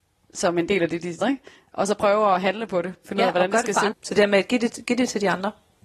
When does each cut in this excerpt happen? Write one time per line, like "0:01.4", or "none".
0:01.2
0:03.9

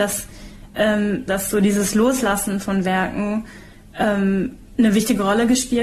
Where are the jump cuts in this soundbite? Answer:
0:01.3

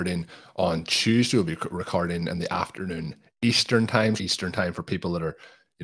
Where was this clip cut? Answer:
0:04.2

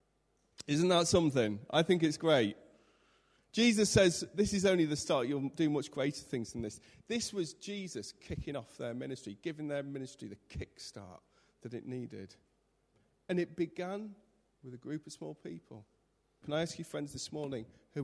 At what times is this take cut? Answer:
0:16.4

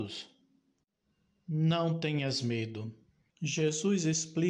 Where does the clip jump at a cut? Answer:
0:03.3

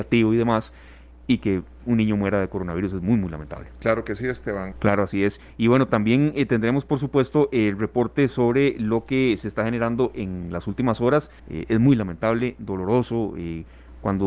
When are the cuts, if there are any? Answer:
0:04.7
0:11.4

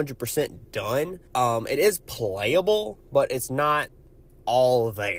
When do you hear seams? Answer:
0:01.3

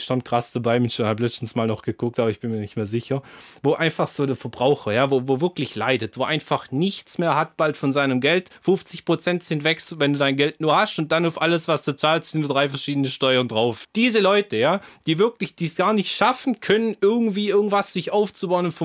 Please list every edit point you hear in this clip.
0:13.8

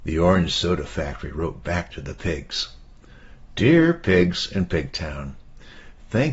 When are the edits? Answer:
none

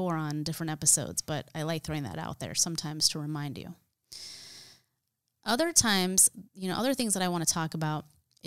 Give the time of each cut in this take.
none

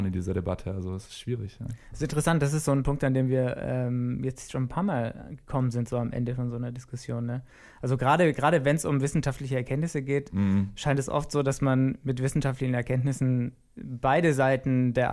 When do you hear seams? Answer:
none

